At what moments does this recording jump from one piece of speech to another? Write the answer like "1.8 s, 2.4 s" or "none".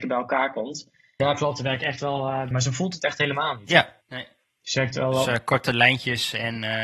1.2 s, 2.5 s, 4.0 s